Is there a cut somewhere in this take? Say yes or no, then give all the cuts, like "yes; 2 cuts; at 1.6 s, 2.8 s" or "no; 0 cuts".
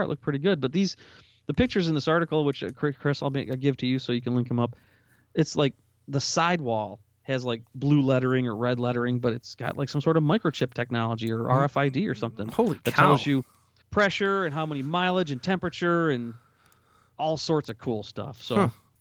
no; 0 cuts